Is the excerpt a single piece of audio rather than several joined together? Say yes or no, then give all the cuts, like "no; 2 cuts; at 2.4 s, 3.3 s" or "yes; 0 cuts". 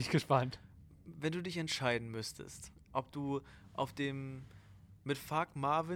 no; 1 cut; at 2.9 s